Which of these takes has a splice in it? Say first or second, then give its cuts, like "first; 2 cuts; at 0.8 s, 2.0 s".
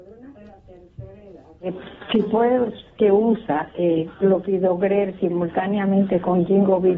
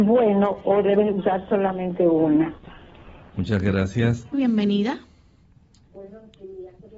second; 2 cuts; at 3.2 s, 4.3 s